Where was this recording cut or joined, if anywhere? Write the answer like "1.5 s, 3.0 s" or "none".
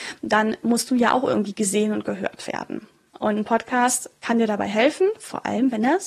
3.1 s